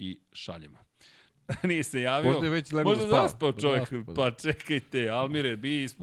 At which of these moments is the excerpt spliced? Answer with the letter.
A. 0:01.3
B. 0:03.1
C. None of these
A